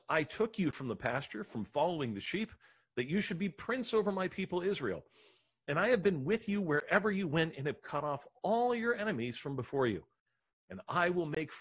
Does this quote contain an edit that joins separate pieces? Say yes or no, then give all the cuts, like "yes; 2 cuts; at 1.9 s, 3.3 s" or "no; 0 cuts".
no; 0 cuts